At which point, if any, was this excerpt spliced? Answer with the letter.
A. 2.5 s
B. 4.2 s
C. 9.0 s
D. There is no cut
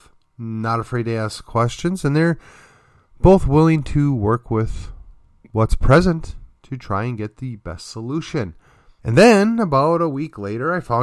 C